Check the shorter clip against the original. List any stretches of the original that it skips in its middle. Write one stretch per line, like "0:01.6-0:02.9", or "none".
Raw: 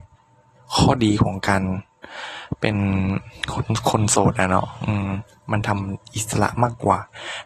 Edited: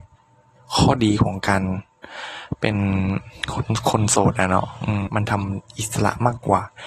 0:05.1-0:05.4